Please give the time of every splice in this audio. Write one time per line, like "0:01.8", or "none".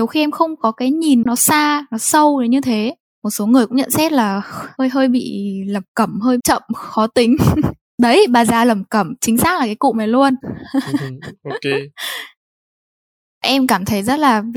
0:01.2
0:06.4

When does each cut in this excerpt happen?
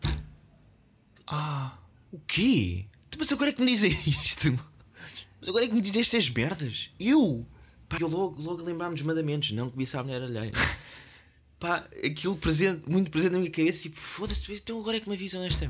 0:08.0
0:10.5

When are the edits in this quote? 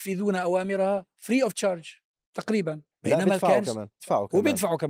0:04.0

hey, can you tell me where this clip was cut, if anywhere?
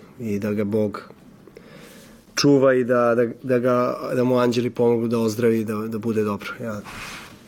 none

